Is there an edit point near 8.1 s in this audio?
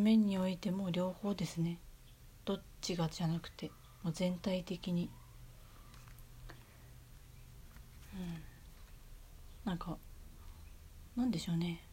no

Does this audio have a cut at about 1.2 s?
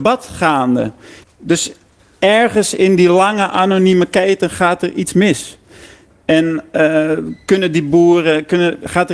yes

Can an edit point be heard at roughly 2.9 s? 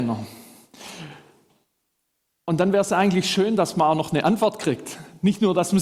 no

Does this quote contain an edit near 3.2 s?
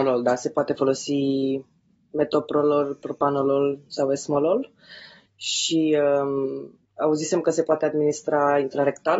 no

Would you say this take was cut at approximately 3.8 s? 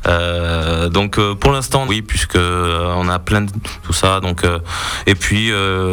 yes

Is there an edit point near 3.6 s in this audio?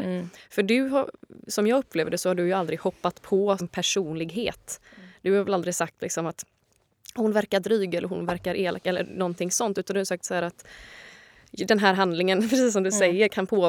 yes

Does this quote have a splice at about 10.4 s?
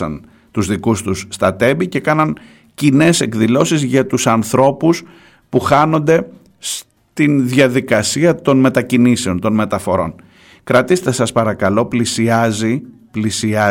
no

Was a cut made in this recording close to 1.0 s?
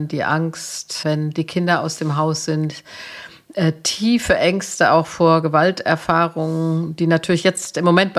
yes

